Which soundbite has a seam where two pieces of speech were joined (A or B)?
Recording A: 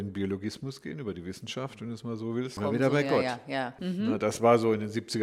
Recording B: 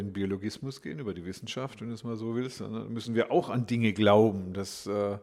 A